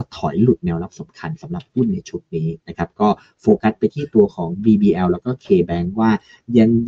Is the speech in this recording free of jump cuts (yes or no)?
yes